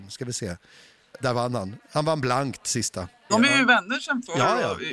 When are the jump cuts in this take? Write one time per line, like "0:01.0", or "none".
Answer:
0:01.2
0:03.3